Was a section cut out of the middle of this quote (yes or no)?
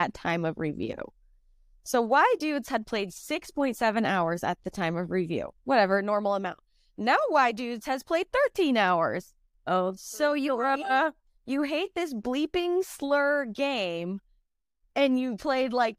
no